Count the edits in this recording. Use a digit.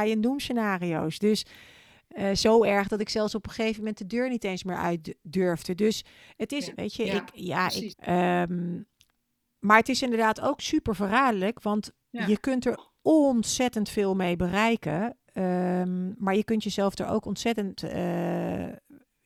2